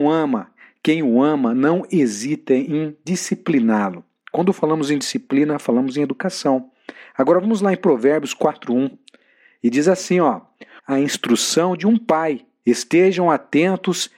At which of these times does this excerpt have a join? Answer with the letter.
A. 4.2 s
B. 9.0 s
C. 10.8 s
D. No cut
C